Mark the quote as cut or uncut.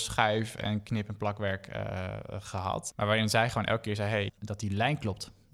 cut